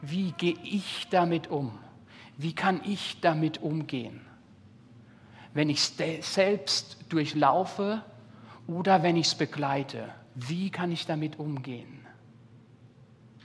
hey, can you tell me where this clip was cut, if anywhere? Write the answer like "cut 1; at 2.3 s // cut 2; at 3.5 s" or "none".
none

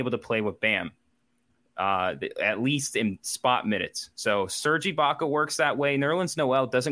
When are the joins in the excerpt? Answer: none

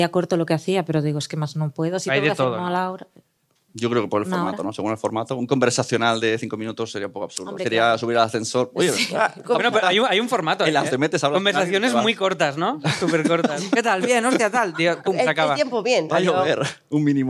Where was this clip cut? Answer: cut 1; at 10.9 s

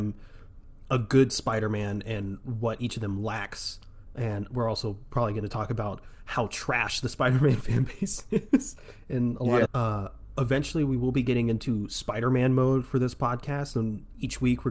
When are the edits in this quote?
cut 1; at 9.7 s

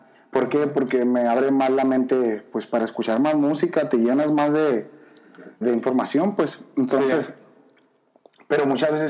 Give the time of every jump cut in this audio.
cut 1; at 5.6 s

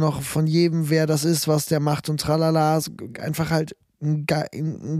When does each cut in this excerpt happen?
none

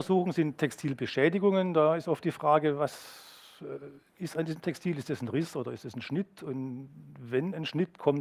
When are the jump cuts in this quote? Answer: none

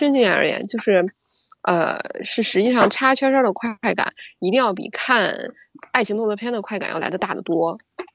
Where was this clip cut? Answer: none

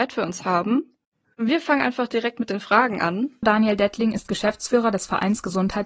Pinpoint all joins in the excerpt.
cut 1; at 1.2 s // cut 2; at 3.4 s

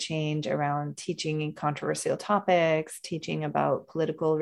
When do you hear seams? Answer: none

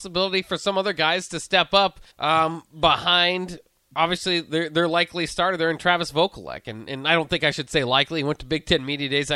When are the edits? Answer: cut 1; at 2.1 s

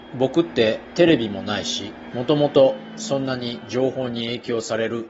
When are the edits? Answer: cut 1; at 2.1 s

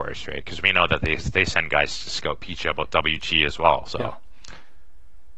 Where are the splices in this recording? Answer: none

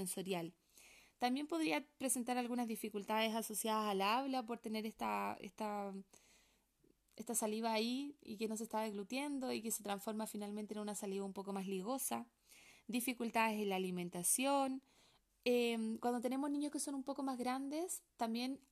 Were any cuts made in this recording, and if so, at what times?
cut 1; at 15.3 s

